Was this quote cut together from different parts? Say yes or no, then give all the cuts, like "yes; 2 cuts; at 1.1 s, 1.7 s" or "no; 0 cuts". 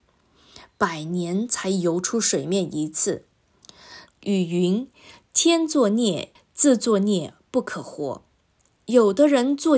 yes; 2 cuts; at 4.1 s, 6.4 s